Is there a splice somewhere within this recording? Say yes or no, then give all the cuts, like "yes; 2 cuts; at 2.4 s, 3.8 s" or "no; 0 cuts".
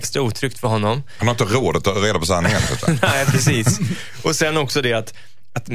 no; 0 cuts